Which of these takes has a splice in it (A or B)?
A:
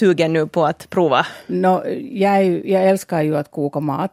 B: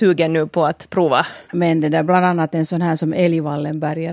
B